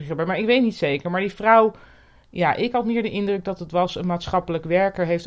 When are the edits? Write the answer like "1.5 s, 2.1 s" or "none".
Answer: 2.2 s